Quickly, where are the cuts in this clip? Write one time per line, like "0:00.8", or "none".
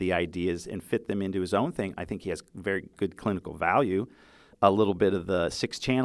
0:01.9
0:04.5

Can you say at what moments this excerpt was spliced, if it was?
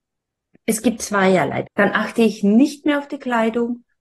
0:01.6

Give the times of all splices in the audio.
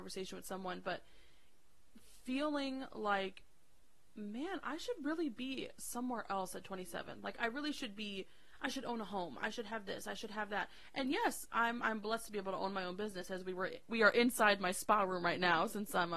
0:07.3

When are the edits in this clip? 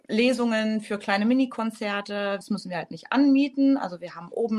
0:02.4

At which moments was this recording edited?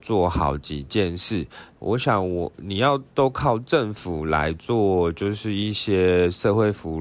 0:01.7

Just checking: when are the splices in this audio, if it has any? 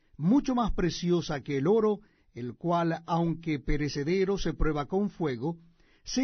none

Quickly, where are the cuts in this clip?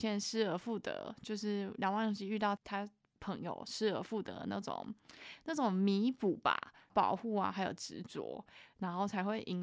0:02.6
0:06.9

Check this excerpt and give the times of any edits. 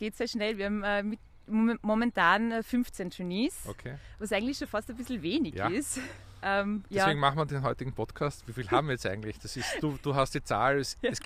0:08.4

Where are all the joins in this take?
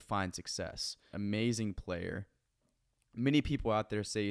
0:01.1

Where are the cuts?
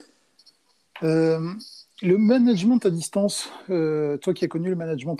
none

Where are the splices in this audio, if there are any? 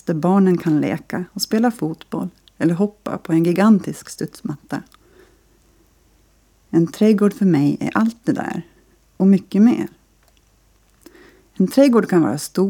none

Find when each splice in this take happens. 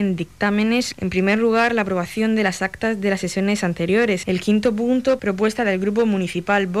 0:00.9
0:04.2

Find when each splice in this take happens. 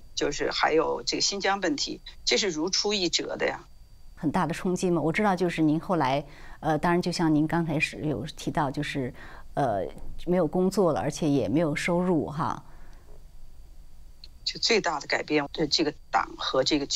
0:04.2
0:14.4
0:15.5

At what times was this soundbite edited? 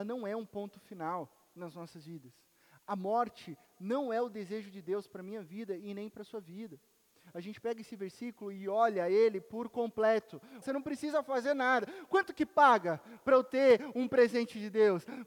0:07.3
0:10.6

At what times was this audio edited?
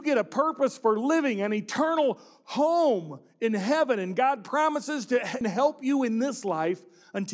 0:05.4

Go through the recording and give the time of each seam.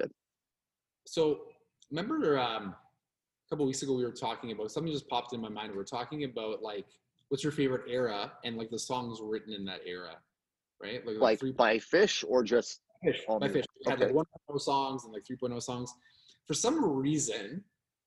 none

